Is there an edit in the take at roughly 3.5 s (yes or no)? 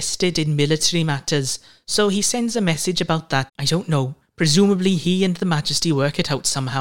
yes